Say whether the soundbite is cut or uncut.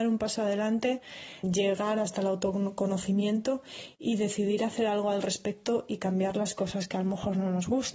cut